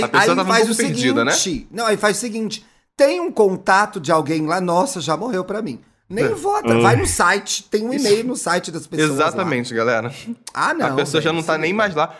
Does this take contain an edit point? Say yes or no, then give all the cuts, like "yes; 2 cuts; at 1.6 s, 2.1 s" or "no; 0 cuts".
no; 0 cuts